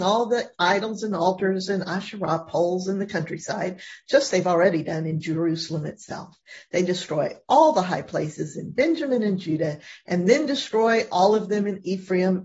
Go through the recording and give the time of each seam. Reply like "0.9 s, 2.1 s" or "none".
4.3 s

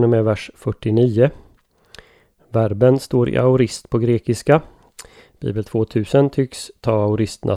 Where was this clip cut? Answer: none

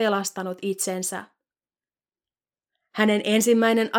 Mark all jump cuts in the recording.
none

